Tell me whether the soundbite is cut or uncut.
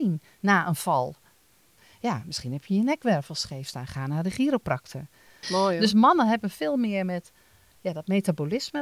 cut